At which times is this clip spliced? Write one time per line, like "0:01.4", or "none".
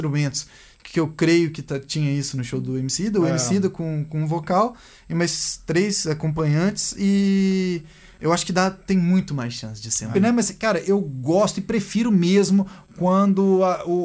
0:10.1